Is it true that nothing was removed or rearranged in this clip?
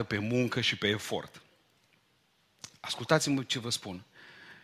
yes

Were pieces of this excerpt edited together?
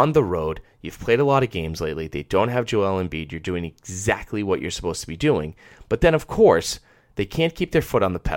no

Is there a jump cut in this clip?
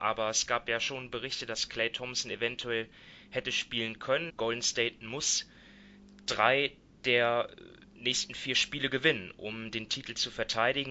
yes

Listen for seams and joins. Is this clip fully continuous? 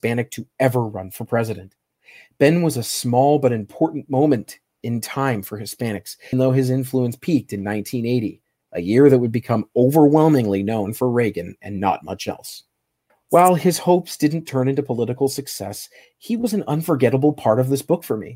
no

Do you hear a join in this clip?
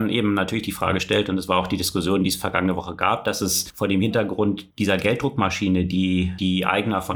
no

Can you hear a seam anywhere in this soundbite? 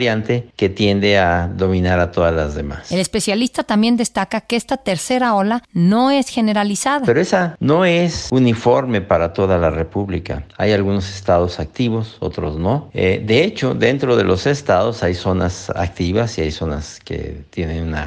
no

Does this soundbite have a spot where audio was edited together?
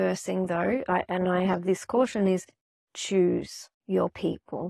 no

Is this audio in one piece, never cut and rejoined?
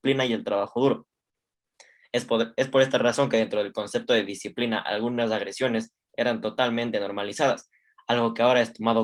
yes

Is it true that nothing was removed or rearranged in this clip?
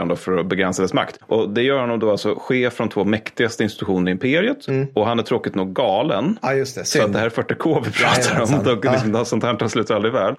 yes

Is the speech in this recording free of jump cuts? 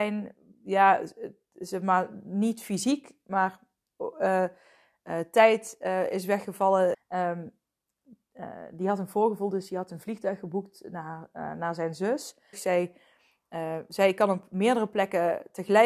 no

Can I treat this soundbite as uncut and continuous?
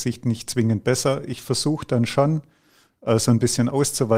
yes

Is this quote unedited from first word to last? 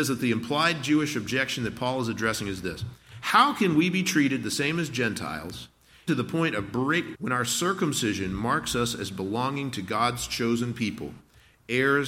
no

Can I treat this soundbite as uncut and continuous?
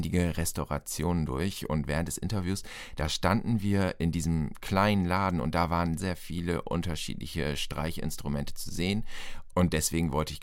no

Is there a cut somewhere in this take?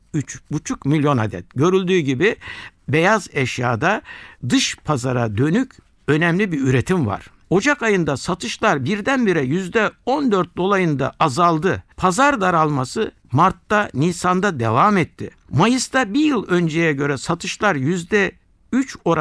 yes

